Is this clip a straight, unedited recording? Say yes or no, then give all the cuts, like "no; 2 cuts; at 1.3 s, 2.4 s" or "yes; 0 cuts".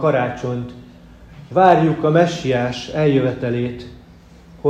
yes; 0 cuts